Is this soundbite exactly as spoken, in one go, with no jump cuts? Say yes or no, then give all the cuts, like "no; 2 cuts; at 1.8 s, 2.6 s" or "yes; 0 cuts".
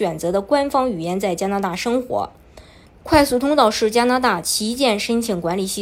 no; 1 cut; at 2.9 s